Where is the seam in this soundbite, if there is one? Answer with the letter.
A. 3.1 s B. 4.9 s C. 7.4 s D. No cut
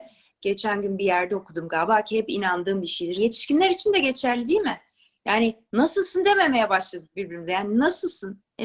A